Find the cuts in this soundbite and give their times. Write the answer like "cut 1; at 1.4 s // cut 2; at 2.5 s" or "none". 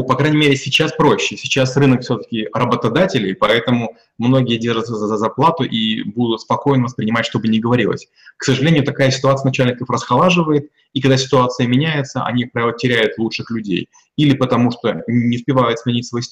none